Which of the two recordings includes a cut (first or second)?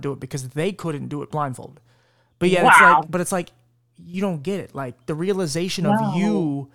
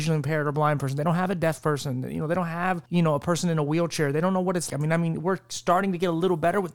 second